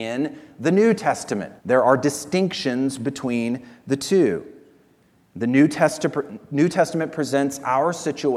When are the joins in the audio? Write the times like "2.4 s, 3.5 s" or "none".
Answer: 1.6 s

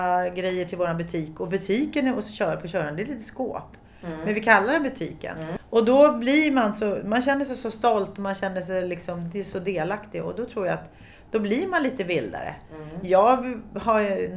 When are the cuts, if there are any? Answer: none

